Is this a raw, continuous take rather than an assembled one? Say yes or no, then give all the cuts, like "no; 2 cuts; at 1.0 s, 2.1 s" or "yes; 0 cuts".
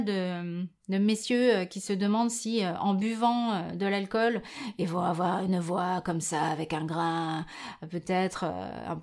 yes; 0 cuts